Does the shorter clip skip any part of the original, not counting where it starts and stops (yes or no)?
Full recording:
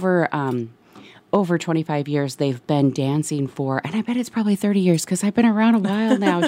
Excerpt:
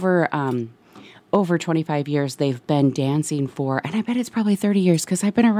no